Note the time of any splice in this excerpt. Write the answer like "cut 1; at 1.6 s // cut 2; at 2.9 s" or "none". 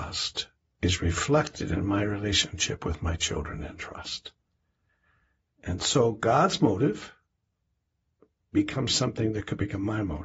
none